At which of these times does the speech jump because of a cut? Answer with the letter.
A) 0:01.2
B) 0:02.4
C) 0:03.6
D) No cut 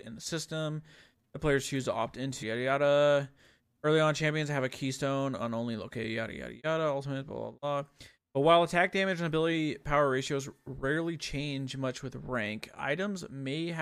B